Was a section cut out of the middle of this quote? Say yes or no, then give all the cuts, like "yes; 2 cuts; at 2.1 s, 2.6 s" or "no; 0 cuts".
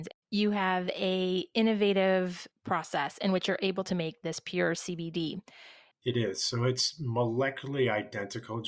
yes; 1 cut; at 5.9 s